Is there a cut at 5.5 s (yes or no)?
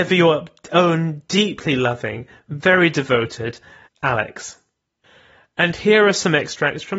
no